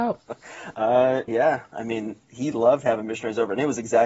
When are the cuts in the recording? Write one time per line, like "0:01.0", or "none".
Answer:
0:01.3